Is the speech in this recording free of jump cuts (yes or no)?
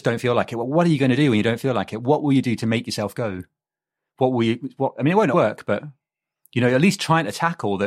no